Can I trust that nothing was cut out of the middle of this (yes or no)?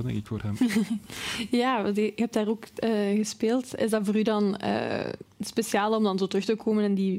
yes